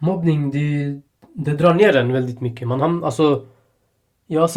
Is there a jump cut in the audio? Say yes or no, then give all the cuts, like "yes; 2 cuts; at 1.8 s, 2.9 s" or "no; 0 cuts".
no; 0 cuts